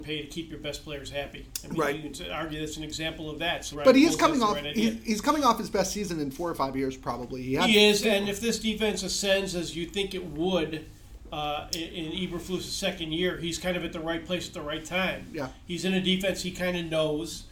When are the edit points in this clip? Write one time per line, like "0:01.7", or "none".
0:03.7